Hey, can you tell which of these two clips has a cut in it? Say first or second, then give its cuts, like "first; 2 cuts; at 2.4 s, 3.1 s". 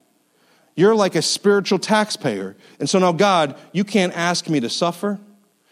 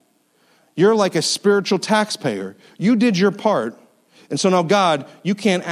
first; 1 cut; at 2.7 s